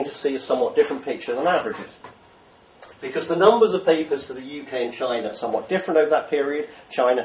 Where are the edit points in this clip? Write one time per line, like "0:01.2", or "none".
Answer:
0:02.9

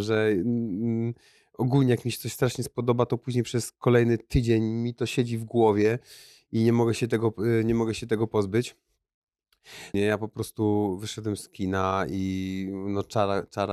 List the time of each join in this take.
0:09.9

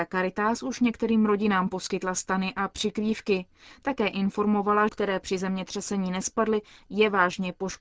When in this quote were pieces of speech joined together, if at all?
0:04.9

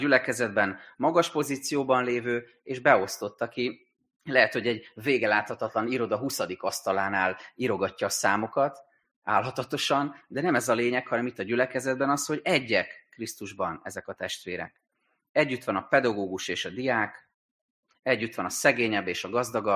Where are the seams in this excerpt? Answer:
none

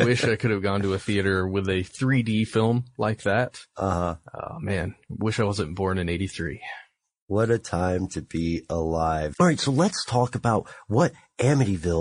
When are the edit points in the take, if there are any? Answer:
0:09.3

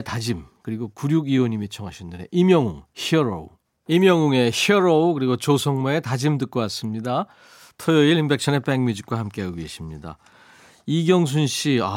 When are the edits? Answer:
none

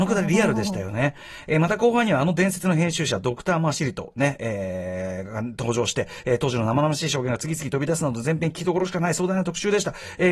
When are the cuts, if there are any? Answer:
none

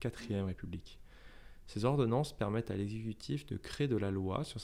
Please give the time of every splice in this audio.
0:01.6

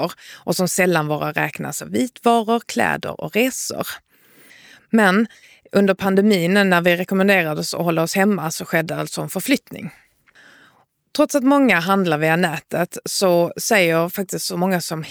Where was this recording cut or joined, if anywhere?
none

